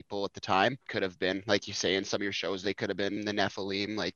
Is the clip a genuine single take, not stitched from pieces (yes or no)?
no